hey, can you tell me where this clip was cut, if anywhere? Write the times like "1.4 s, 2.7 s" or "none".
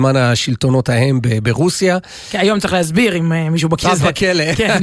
3.8 s